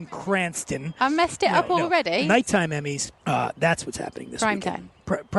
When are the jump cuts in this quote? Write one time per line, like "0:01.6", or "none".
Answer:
0:03.2